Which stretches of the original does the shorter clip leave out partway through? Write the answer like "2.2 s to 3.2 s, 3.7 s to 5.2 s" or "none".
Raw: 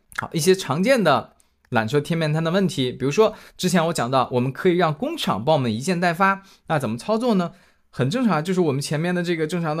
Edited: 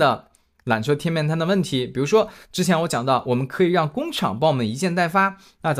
none

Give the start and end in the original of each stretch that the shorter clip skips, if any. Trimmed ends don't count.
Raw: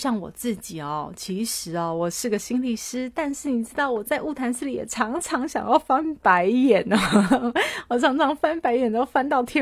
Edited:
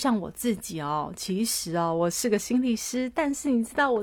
none

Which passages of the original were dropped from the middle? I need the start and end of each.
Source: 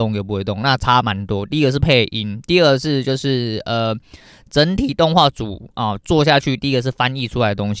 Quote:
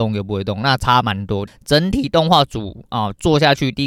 1.5 s to 4.3 s

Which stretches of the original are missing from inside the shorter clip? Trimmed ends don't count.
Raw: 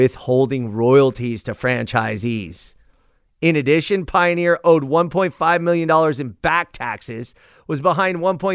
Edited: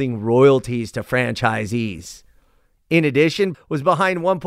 4.1 s to 7.5 s

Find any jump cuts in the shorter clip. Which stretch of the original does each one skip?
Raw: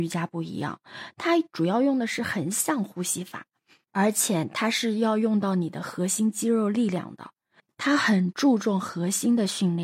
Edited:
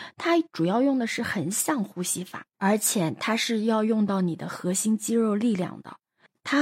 3.5 s to 3.8 s

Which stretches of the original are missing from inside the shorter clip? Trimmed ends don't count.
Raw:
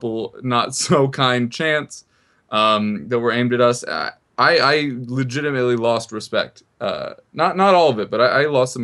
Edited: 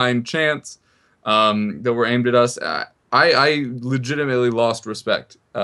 none

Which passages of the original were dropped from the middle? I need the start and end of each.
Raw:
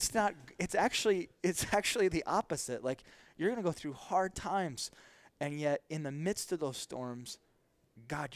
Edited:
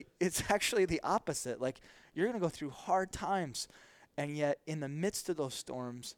none

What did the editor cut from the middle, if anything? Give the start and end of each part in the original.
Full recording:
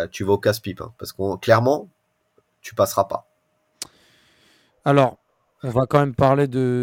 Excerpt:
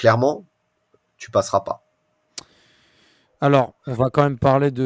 5.2 s to 5.5 s

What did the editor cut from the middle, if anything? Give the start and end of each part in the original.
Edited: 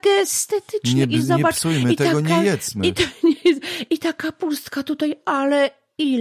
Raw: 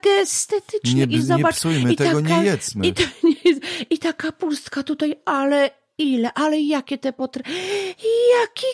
none

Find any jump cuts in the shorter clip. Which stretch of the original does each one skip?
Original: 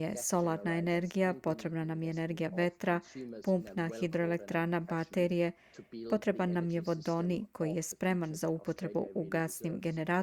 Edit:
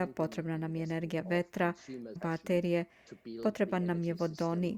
3.4 s to 4.8 s

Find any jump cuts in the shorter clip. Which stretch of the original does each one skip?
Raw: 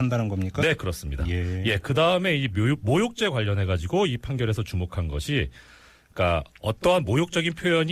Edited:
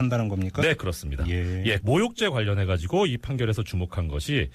1.8 s to 2.8 s

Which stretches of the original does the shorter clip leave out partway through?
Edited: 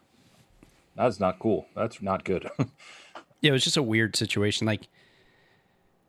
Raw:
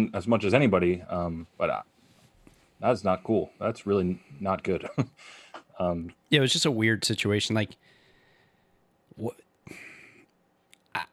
3.8 s to 4.4 s, 5.7 s to 6.2 s

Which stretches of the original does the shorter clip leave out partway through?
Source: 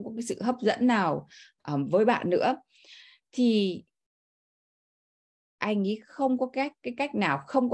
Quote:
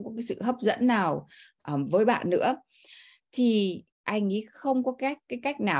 3.9 s to 5.5 s

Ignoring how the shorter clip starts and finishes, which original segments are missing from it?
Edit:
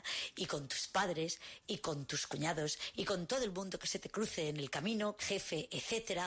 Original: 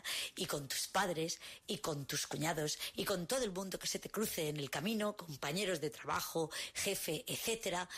5.2 s to 6.7 s

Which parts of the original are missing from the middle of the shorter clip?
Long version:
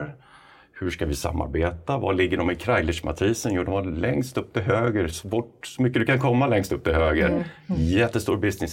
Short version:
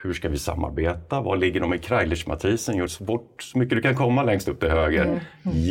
3.6 s to 5.1 s

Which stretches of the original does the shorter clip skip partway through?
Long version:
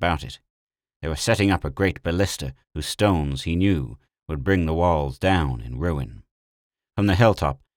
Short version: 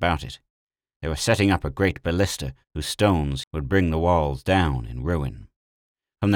3.4 s to 4.2 s

